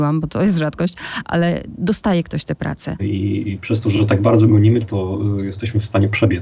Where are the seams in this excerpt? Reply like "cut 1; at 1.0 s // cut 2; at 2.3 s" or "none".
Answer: cut 1; at 3.0 s // cut 2; at 4.8 s

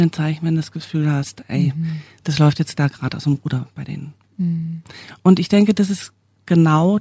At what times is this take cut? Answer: none

